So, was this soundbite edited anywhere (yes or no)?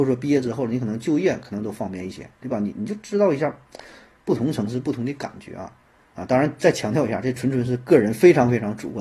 no